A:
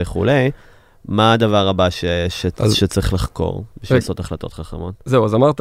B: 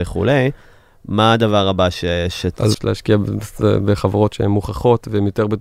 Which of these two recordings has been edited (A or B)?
B